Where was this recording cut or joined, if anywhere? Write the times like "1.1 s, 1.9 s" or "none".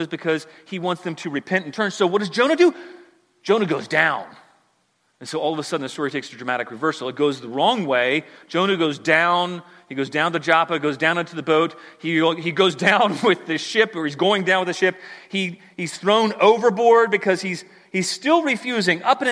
none